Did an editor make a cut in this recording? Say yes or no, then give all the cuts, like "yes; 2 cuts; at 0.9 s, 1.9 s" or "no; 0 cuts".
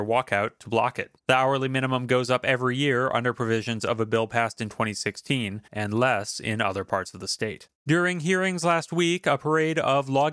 yes; 3 cuts; at 1.2 s, 5.7 s, 7.8 s